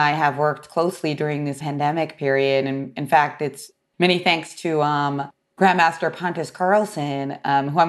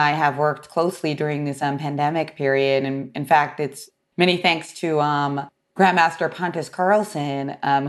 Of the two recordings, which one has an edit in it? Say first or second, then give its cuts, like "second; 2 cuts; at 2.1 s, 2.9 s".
first; 1 cut; at 1.6 s